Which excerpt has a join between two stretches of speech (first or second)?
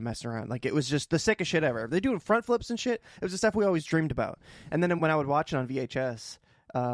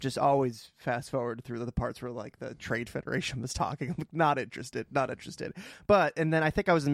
first